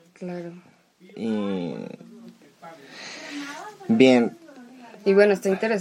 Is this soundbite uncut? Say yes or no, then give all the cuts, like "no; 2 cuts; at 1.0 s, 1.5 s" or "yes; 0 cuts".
yes; 0 cuts